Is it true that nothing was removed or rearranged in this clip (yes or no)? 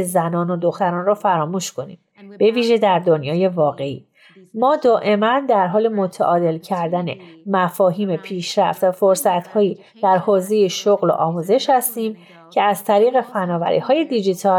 yes